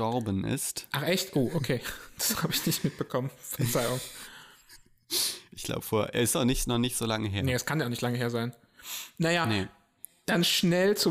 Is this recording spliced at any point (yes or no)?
no